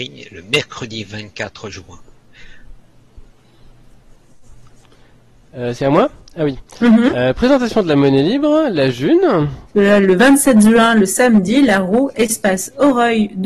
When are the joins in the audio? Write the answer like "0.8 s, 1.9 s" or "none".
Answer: 9.7 s